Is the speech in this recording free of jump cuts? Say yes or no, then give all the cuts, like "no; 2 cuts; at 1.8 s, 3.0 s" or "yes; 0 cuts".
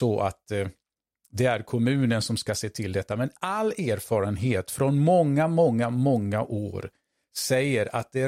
yes; 0 cuts